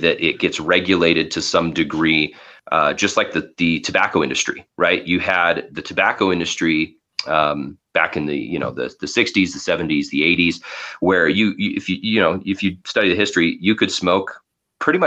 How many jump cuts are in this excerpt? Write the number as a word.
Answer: zero